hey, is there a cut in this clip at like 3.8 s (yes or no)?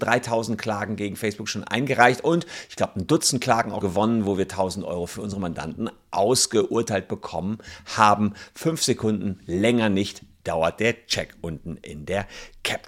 yes